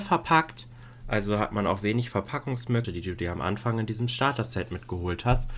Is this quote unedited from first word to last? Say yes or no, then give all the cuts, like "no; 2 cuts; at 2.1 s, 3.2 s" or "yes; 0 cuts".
no; 1 cut; at 2.8 s